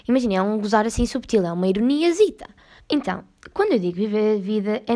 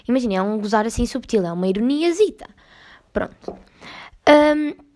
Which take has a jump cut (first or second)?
first